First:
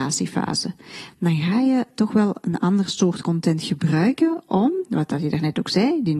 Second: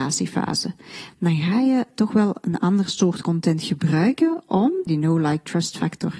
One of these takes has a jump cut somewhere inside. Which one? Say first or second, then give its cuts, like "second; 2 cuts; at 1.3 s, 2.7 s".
second; 1 cut; at 4.9 s